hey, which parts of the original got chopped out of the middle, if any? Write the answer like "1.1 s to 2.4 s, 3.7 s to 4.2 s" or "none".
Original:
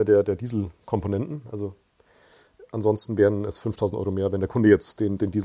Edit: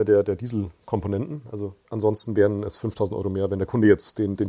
1.8 s to 2.7 s